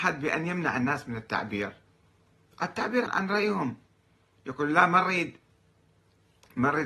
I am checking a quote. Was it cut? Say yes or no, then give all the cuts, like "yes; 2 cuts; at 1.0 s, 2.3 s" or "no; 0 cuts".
yes; 1 cut; at 3.1 s